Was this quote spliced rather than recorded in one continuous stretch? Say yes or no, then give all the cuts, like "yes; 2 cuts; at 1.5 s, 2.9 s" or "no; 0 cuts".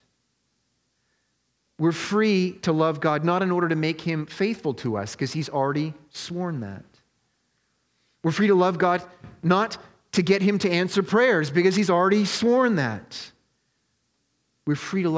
no; 0 cuts